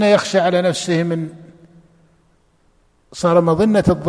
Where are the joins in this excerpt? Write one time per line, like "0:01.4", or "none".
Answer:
none